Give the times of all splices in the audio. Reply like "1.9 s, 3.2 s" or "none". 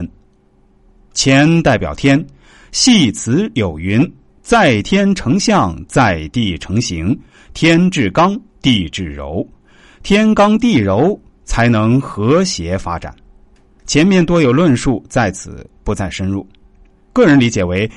17.0 s